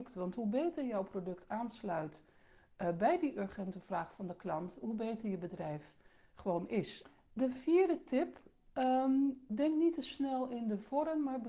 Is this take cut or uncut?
uncut